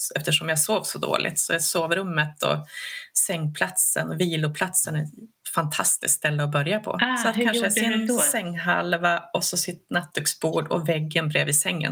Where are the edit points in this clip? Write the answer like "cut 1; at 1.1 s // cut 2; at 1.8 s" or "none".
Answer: none